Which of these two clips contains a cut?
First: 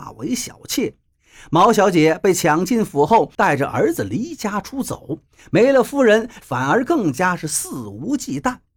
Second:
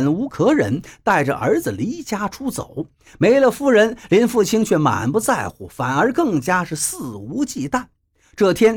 first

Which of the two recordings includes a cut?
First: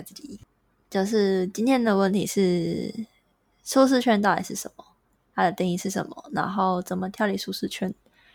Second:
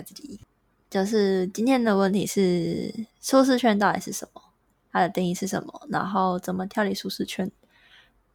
second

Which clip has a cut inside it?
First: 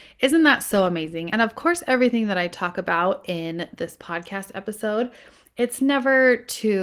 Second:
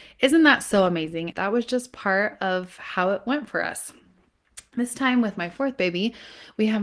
second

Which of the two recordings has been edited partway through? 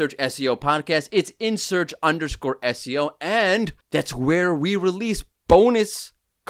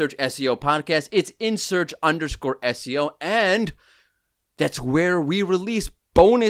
first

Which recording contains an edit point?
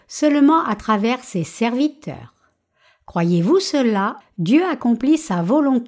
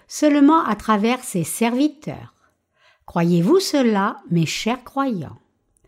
first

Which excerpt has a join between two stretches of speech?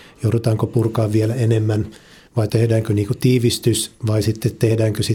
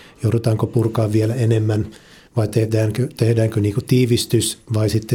first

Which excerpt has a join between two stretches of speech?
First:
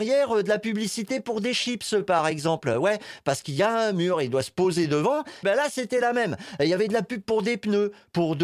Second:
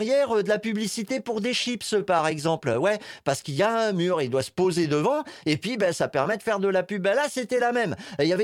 first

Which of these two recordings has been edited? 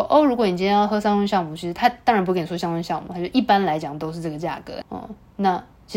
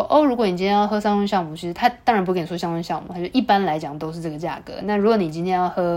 first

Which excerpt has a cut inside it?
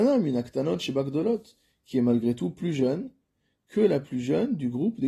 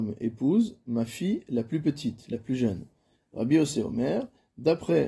second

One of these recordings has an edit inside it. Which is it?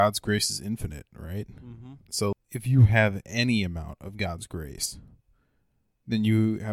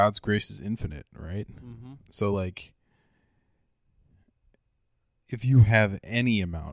first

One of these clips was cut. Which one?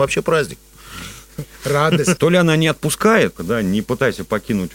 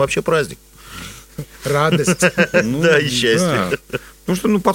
first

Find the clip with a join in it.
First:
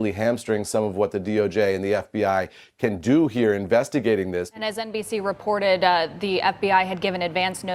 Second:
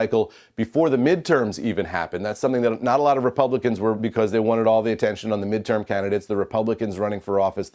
second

